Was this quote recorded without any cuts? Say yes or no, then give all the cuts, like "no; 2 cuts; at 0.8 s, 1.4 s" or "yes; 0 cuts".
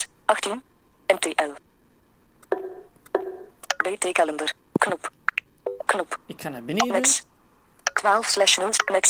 no; 1 cut; at 5.8 s